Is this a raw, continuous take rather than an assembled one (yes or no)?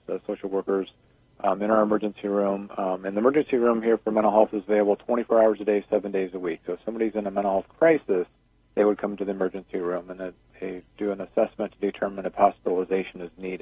yes